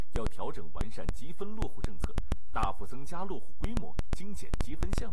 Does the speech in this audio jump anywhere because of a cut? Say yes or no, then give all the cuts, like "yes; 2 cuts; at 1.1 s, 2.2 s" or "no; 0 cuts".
no; 0 cuts